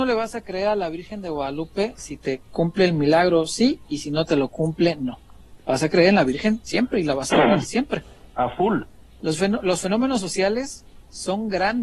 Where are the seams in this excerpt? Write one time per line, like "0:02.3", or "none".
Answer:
0:09.2